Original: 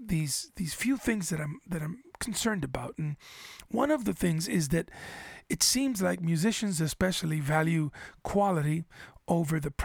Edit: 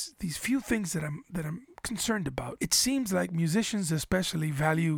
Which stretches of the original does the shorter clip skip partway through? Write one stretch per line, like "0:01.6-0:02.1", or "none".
0:02.9-0:05.5